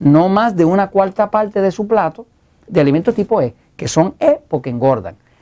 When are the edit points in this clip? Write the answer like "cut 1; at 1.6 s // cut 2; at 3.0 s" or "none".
cut 1; at 2.7 s